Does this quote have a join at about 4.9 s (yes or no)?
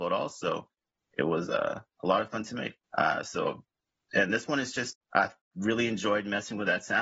yes